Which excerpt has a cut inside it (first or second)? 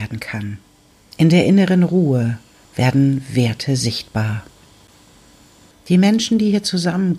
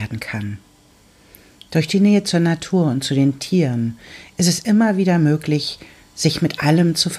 first